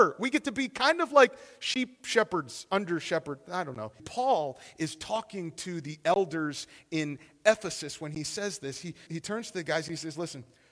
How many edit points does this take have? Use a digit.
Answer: 2